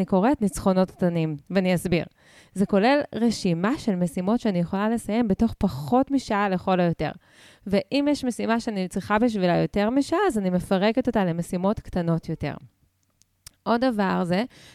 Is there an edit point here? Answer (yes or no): no